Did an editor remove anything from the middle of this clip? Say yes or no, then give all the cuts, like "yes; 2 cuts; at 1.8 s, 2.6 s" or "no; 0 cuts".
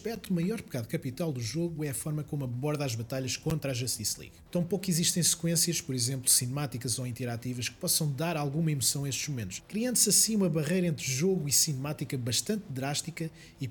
yes; 1 cut; at 4.5 s